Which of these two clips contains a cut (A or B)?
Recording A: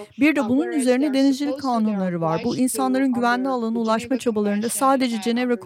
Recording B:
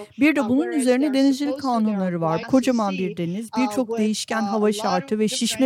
B